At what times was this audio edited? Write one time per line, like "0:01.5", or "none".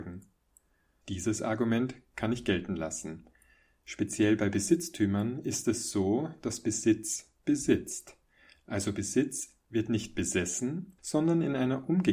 0:01.0
0:11.0

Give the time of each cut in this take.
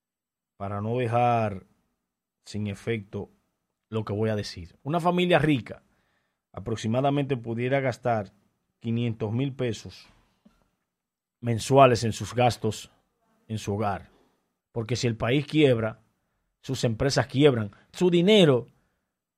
0:14.6
0:17.9

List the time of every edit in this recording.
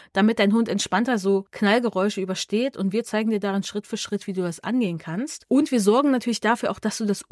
none

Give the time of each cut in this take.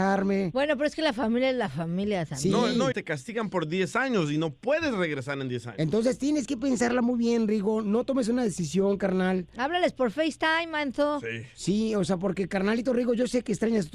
0:02.9

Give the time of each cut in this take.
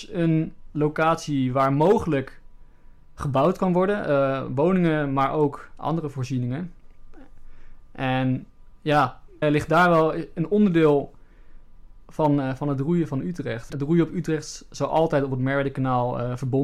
0:09.4

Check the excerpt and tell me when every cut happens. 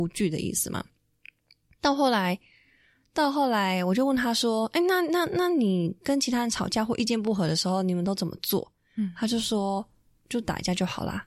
none

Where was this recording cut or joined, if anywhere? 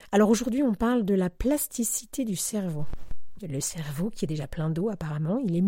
0:03.4

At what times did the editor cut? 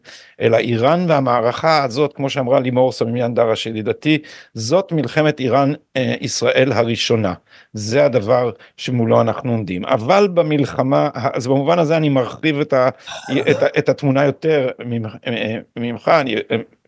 none

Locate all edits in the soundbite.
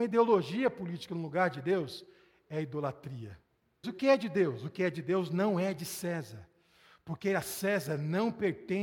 0:03.8

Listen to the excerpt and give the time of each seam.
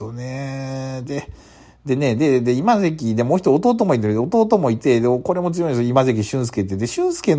none

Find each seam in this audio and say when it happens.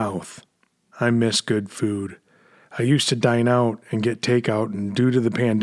0:00.9

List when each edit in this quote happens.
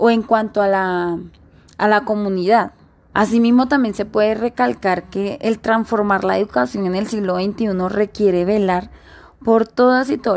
0:03.1

